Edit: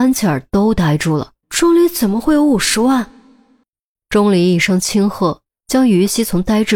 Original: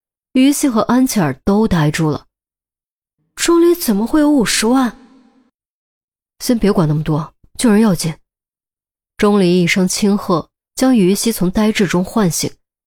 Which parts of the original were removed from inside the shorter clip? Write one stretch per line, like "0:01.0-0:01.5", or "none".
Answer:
0:02.4-0:03.3
0:05.8-0:09.0